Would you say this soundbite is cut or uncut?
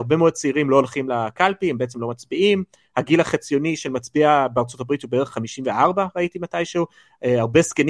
uncut